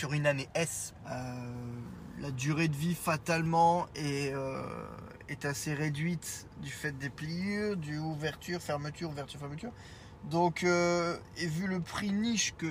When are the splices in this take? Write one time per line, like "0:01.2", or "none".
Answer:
0:01.0